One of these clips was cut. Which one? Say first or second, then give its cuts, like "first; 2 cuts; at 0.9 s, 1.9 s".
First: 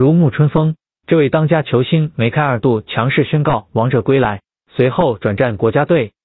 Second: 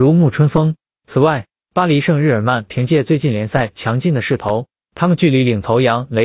second; 1 cut; at 0.9 s